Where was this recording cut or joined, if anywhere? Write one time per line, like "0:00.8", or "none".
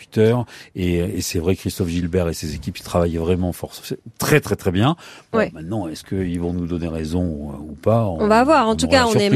none